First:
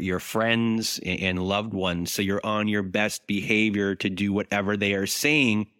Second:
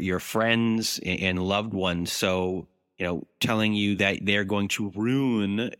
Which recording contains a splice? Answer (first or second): first